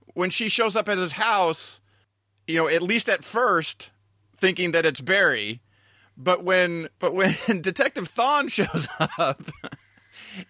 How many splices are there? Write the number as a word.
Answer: one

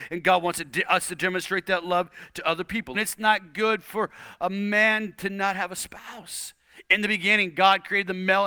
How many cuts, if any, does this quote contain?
one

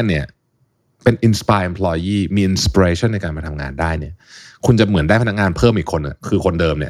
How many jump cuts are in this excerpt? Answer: zero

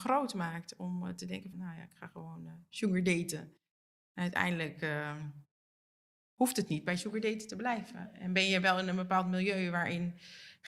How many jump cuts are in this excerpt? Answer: one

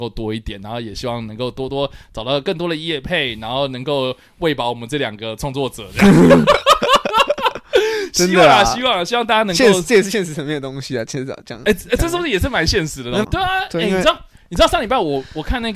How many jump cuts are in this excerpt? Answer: one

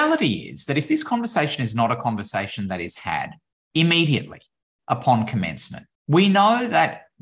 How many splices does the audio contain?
one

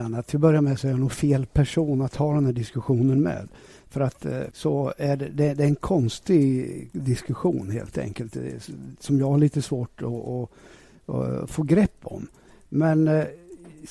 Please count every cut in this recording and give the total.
one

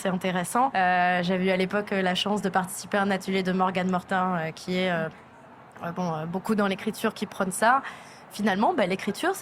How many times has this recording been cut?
zero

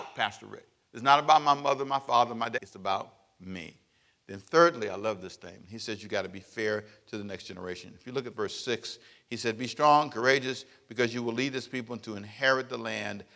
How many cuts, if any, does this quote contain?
one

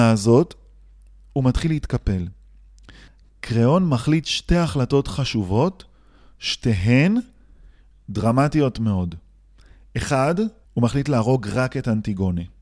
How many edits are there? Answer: one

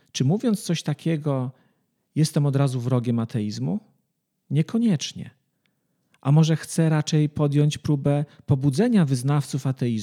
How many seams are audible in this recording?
zero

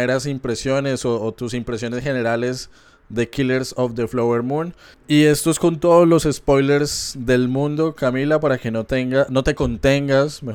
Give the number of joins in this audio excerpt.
one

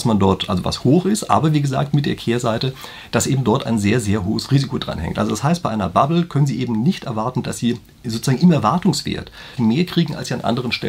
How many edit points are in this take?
one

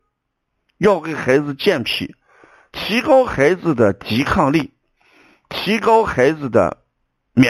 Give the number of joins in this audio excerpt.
zero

